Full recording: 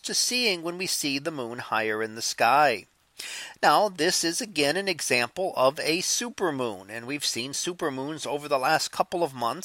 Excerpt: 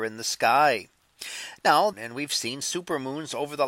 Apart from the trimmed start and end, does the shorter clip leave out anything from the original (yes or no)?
yes